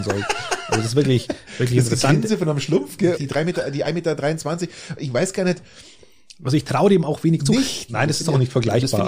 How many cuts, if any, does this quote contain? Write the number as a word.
two